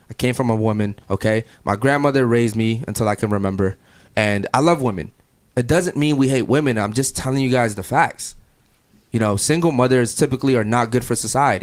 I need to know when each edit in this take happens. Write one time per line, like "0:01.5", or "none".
0:01.0